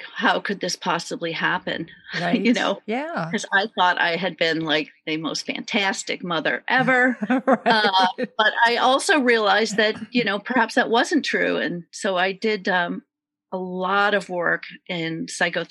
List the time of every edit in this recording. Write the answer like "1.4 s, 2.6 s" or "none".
none